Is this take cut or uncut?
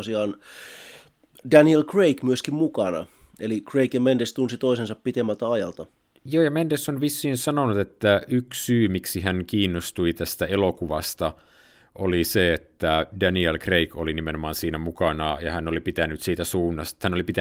uncut